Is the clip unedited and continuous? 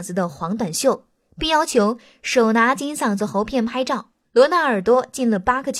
no; 1 cut; at 4.3 s

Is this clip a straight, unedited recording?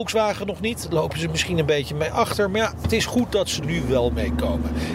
no; 1 cut; at 3.6 s

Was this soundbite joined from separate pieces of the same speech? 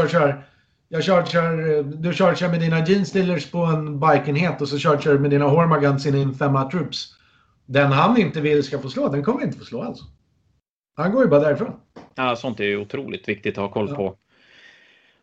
no; 0 cuts

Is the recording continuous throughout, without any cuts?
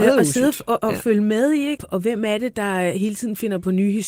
no; 1 cut; at 1.8 s

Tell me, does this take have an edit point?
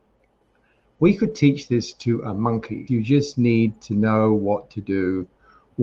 yes; 1 cut; at 2.9 s

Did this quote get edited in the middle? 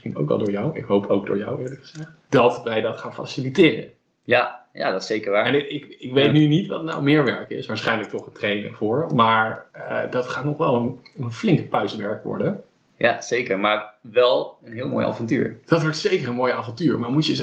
no; 0 cuts

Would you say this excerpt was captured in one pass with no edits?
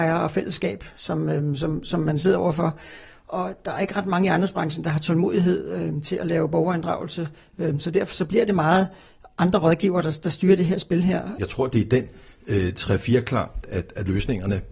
no; 2 cuts; at 11.4 s, 13.6 s

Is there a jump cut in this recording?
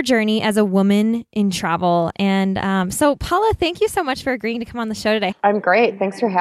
yes; 2 cuts; at 2.1 s, 5.3 s

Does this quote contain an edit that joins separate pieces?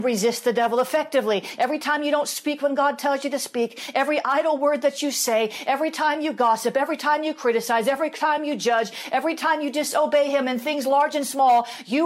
yes; 1 cut; at 1.6 s

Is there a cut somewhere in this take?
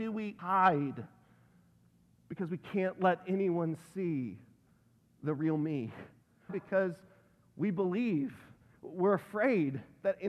yes; 1 cut; at 6.5 s

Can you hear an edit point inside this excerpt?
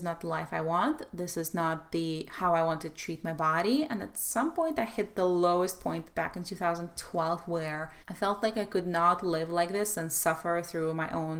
yes; 1 cut; at 8.0 s

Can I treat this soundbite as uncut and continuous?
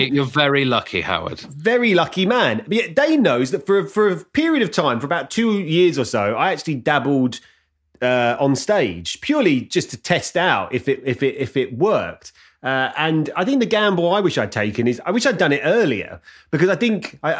yes; 0 cuts

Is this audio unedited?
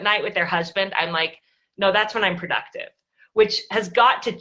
yes; 0 cuts

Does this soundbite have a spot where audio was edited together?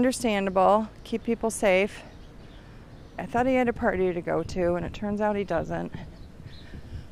yes; 1 cut; at 3.2 s

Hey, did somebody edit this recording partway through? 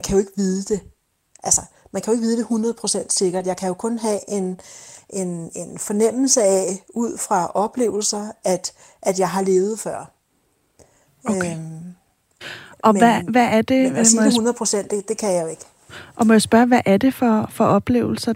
no; 0 cuts

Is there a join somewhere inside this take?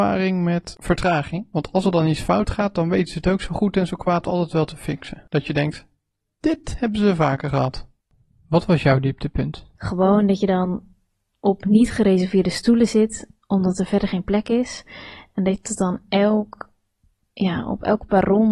yes; 1 cut; at 9.7 s

